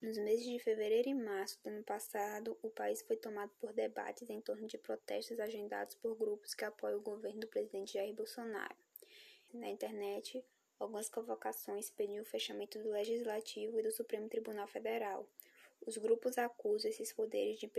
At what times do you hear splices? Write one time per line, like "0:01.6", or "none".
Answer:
0:09.5

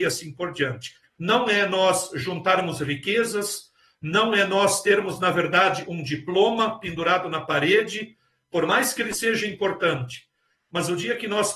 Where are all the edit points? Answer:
0:01.0

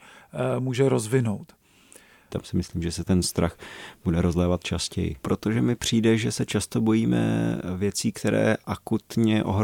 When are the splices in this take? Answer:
0:02.3
0:05.2

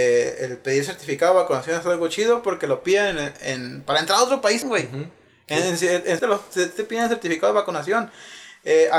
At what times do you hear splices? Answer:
0:04.6
0:06.2

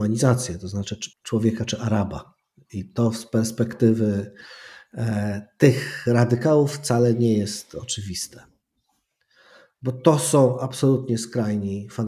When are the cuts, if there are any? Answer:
0:01.1

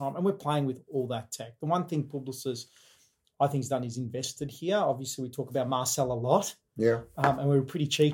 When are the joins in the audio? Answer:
none

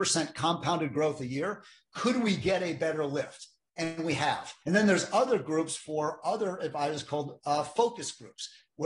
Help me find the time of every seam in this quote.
0:04.6

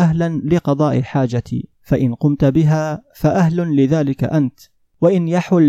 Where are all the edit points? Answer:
0:01.7

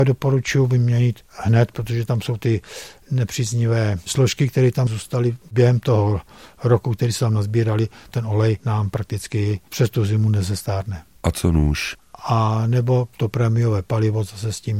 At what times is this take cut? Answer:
0:12.0

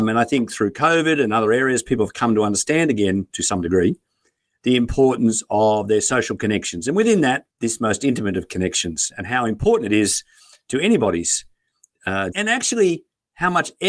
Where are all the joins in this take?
0:07.5
0:12.3

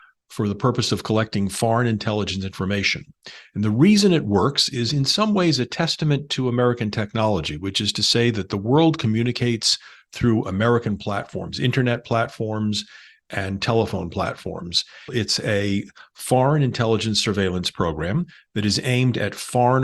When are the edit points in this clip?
0:15.1

